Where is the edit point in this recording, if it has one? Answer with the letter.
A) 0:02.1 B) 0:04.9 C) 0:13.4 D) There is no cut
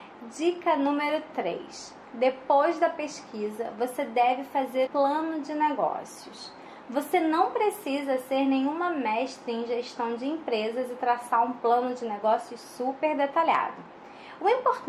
B